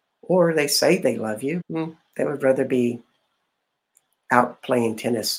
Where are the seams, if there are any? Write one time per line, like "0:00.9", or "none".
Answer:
0:01.6

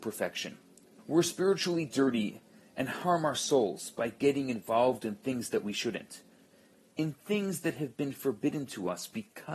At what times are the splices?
0:01.0

